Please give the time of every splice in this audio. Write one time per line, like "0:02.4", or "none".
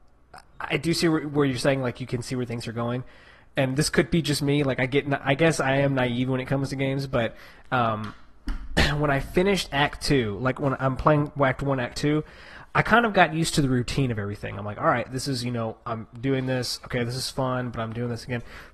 none